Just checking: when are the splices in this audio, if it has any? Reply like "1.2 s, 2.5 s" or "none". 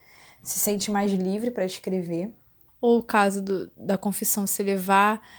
2.7 s